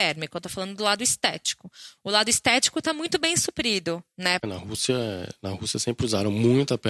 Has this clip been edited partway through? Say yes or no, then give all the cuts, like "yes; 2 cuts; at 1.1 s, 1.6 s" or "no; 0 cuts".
yes; 1 cut; at 4.4 s